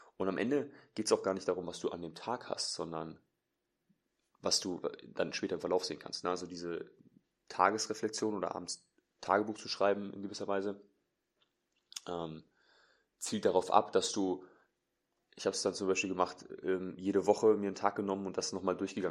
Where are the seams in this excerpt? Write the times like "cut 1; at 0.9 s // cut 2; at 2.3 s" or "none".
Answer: none